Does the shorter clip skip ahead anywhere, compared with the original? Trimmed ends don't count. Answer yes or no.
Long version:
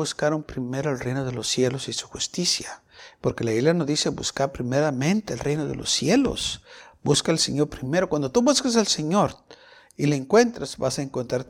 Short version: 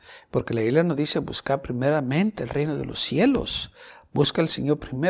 no